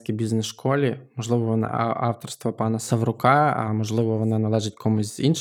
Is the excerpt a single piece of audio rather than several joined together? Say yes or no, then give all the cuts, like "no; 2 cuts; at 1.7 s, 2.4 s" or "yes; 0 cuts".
yes; 0 cuts